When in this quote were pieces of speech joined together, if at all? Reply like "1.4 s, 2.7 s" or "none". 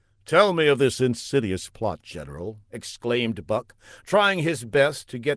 none